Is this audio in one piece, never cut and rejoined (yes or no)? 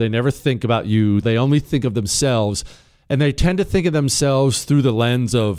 no